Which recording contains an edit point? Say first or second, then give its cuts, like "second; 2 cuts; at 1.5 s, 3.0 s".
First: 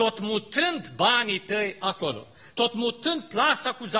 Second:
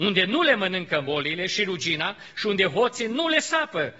first; 1 cut; at 2.5 s